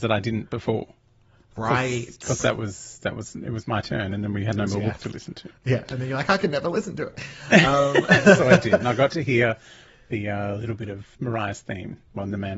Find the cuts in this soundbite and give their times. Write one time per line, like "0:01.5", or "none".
0:11.1